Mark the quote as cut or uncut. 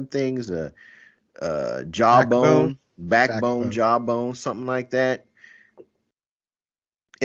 uncut